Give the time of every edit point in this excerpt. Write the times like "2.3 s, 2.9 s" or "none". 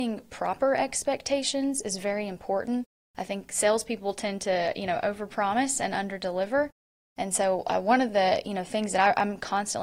none